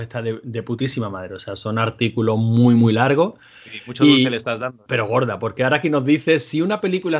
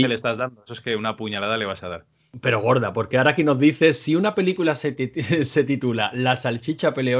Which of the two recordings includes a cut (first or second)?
first